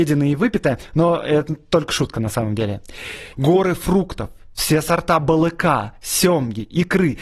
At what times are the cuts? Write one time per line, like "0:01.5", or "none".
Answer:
0:03.3